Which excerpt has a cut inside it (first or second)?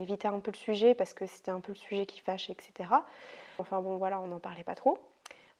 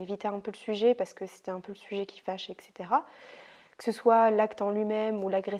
first